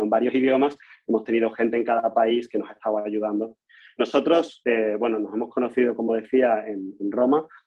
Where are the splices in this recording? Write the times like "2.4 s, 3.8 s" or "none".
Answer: none